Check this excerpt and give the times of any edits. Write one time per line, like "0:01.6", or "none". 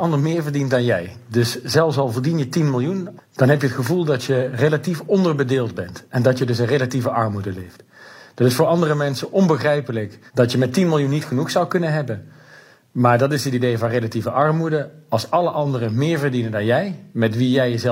0:03.2
0:10.3